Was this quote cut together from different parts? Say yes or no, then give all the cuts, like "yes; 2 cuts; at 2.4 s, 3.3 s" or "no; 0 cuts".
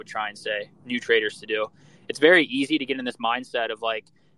no; 0 cuts